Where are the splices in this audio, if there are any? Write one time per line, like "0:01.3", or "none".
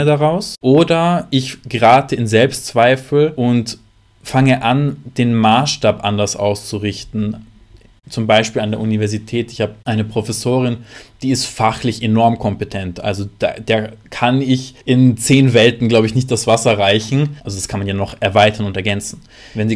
0:14.8
0:17.4